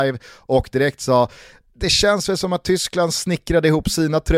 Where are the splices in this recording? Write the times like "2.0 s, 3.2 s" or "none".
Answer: none

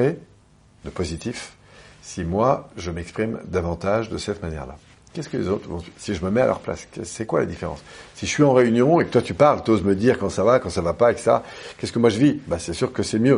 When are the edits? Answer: none

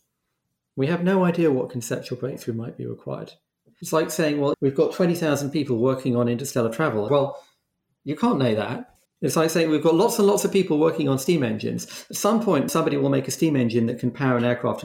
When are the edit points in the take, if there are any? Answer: 4.5 s, 7.1 s, 9.1 s

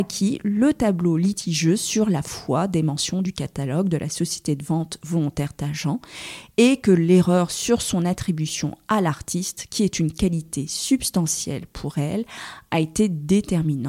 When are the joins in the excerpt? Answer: none

